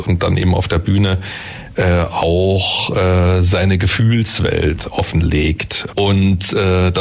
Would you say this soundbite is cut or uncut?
cut